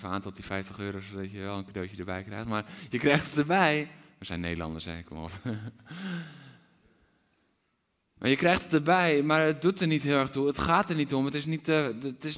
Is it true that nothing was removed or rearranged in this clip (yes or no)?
yes